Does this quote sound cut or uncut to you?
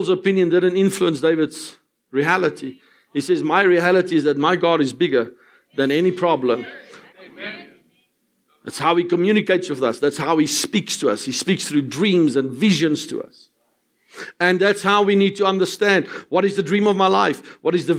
cut